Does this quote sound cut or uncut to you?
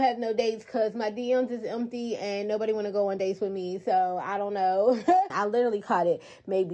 cut